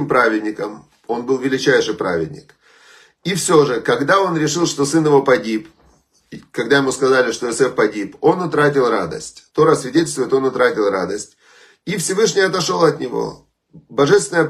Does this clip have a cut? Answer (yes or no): yes